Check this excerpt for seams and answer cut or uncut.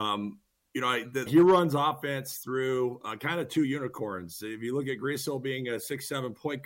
cut